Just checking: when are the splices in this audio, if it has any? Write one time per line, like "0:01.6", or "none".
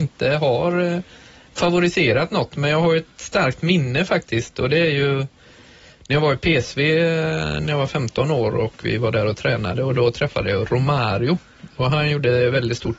none